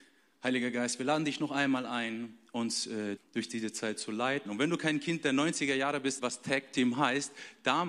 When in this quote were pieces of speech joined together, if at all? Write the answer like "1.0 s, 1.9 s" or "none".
3.2 s, 4.5 s, 6.2 s

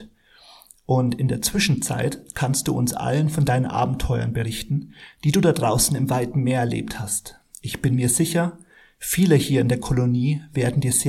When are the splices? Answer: none

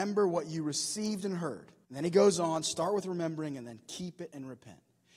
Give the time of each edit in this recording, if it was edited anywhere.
1.8 s

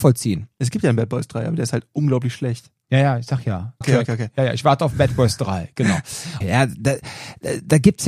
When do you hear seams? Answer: 3.8 s, 6.4 s

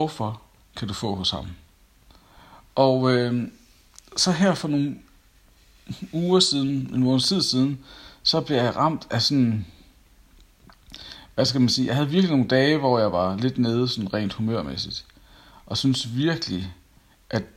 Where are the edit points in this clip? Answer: 2.7 s

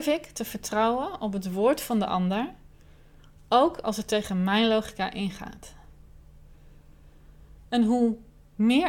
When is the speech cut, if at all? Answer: none

